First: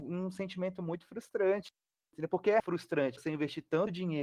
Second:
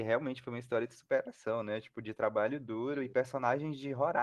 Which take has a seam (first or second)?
first